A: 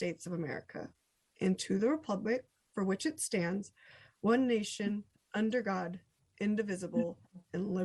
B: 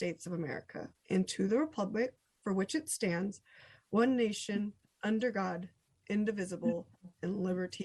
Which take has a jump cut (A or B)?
B